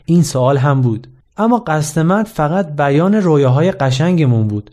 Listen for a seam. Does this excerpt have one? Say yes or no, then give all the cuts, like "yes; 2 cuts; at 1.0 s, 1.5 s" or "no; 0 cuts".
yes; 1 cut; at 1.2 s